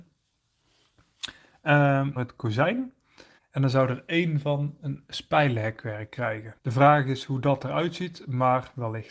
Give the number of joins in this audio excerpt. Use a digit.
3